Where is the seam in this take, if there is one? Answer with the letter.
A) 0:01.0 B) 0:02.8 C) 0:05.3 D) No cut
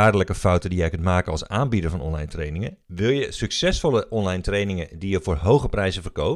B